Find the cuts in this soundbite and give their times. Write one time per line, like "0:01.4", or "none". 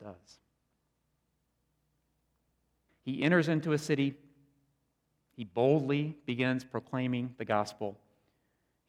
0:02.9